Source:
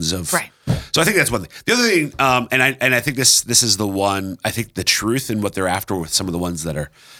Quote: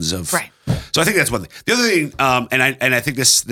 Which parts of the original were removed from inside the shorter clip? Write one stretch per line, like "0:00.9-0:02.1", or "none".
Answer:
none